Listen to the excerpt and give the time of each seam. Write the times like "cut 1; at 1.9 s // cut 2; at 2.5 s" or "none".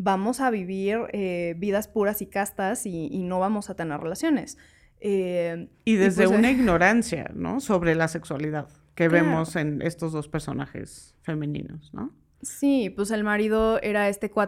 none